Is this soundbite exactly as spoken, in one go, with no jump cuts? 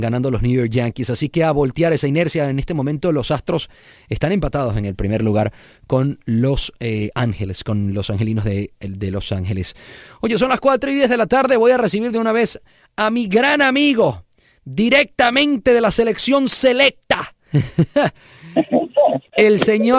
yes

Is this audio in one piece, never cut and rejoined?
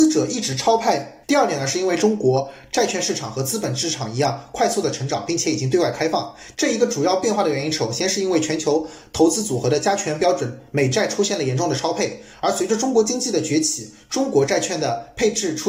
no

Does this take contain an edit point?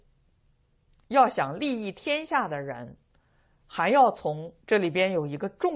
yes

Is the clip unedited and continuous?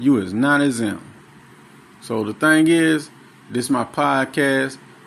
yes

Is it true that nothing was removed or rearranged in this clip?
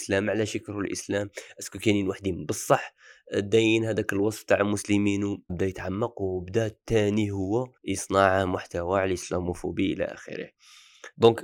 no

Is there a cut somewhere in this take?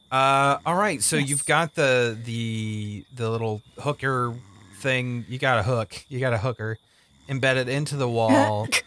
no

